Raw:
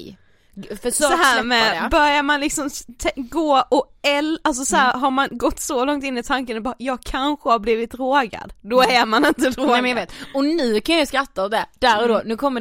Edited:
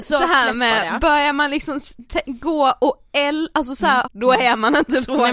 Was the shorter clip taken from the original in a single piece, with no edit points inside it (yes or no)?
no